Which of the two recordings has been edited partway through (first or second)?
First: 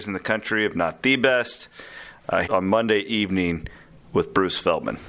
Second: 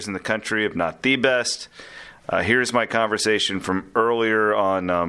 first